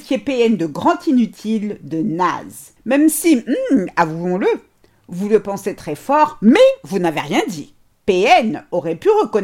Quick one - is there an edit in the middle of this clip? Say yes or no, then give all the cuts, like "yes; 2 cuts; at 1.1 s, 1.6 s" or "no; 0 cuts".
no; 0 cuts